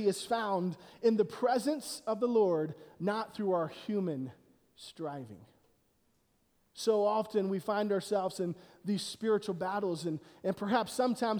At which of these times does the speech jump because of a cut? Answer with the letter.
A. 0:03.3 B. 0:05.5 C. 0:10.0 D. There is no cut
D